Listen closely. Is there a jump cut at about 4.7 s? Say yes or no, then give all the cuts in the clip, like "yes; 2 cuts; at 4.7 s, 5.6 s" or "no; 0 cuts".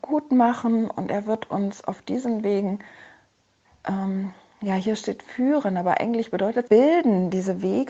no; 1 cut; at 6.7 s